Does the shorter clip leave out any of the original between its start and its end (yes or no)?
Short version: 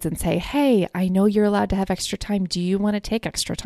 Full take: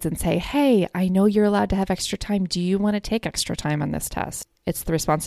no